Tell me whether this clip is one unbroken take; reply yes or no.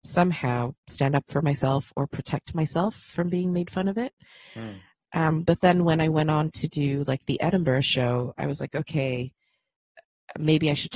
yes